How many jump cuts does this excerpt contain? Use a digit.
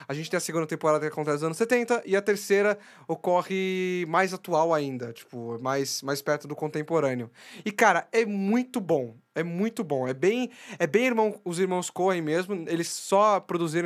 0